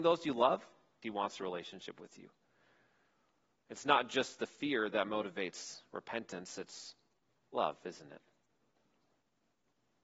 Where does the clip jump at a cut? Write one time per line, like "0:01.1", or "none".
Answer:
0:01.0